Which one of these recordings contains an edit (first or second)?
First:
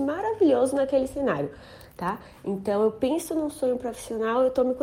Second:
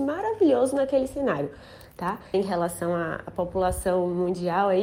second